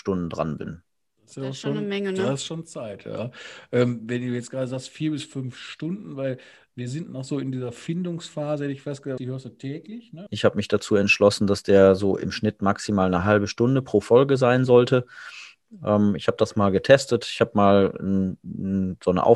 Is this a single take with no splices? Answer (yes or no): no